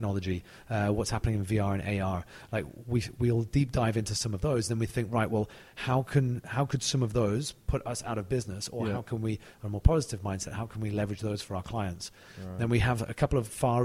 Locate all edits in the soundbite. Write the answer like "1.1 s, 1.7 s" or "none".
none